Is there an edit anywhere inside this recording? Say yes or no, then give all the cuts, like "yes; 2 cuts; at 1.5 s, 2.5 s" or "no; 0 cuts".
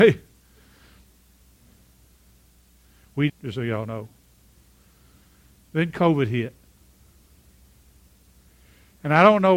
yes; 1 cut; at 3.3 s